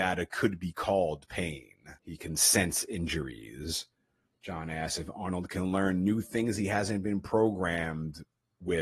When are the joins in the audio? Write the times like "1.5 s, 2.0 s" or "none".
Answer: 2.0 s, 4.4 s